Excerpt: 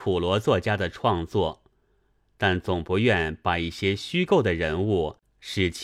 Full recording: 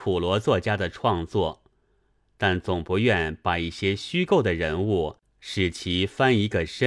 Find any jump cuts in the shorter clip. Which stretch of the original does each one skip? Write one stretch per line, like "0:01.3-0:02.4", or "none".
none